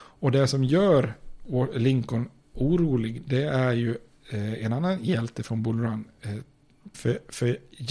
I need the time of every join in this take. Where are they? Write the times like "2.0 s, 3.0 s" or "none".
6.9 s